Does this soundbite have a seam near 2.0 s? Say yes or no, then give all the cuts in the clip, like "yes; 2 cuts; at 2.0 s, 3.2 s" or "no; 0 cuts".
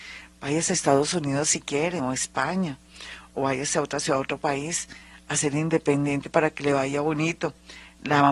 no; 0 cuts